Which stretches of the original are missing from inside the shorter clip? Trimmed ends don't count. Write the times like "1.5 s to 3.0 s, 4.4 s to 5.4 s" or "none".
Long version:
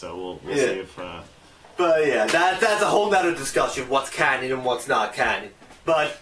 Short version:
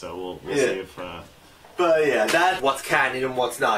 2.6 s to 3.9 s